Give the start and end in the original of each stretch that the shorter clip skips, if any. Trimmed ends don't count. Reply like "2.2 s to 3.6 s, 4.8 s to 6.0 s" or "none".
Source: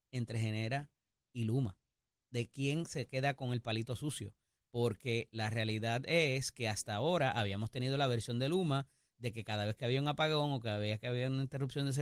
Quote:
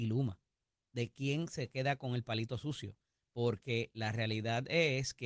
none